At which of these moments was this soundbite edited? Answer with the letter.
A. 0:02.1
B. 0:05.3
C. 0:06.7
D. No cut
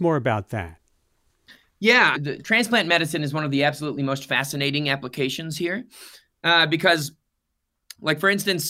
A